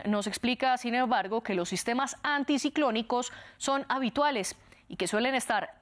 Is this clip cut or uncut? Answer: uncut